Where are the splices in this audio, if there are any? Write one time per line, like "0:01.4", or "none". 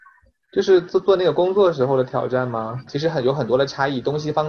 0:02.9